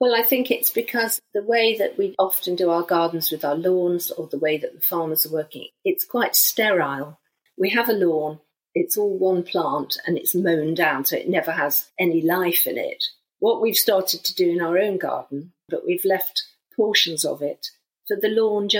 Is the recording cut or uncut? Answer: cut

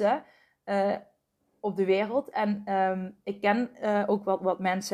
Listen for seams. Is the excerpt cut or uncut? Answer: uncut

